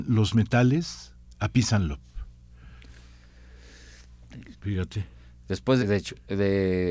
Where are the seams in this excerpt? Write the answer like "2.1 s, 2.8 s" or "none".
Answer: 4.5 s, 5.8 s